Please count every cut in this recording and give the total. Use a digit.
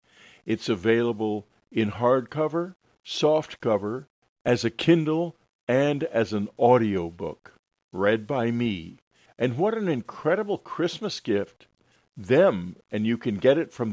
1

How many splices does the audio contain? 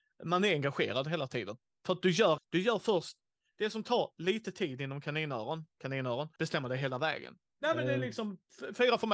3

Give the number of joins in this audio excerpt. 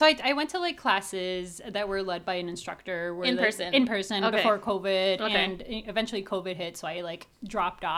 0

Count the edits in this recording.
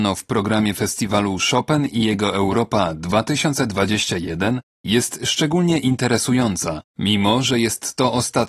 1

